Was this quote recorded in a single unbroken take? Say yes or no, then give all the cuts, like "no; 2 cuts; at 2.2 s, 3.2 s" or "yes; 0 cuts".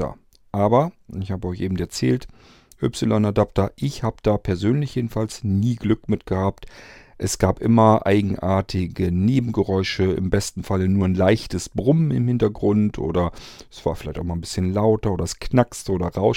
yes; 0 cuts